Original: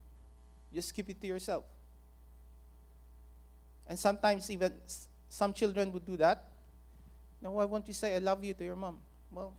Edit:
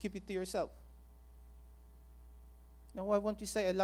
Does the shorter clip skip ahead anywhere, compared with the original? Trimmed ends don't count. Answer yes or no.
yes